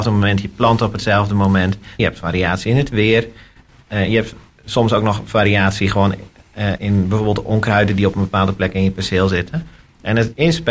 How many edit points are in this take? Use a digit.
1